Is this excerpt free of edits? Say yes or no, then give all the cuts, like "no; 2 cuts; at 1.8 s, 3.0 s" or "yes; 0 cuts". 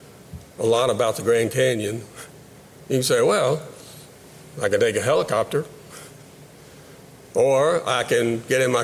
yes; 0 cuts